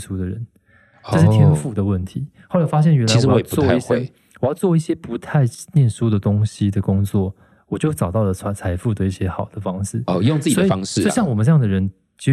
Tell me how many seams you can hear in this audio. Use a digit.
0